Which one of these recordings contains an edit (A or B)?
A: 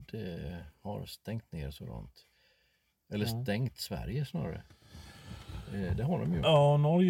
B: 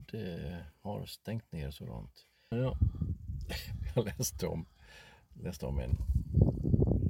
B